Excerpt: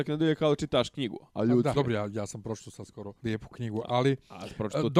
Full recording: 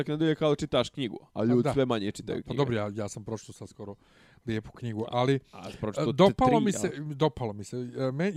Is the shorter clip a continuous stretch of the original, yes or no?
no